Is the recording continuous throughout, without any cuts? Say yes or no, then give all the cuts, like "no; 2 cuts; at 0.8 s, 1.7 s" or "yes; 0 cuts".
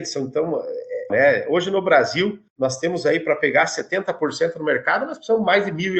no; 2 cuts; at 1.1 s, 2.5 s